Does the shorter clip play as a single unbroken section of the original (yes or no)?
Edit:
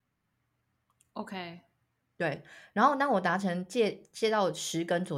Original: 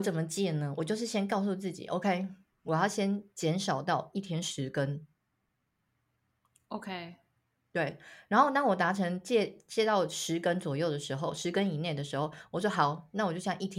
yes